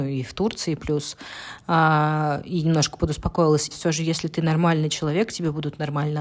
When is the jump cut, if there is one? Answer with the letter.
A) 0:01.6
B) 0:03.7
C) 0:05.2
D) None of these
B